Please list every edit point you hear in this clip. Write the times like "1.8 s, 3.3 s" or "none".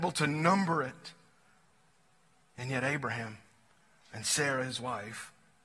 none